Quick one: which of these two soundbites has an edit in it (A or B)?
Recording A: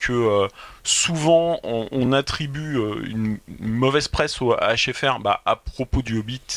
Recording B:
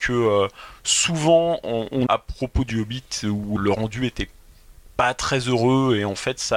B